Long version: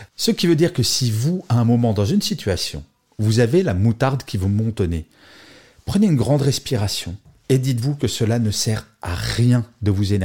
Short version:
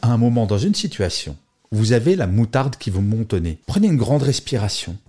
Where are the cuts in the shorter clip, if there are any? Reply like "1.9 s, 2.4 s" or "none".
3.6 s